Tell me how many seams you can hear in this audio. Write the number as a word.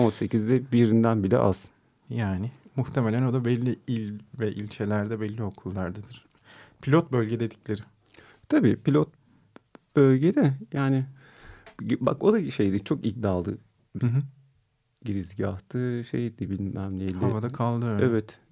zero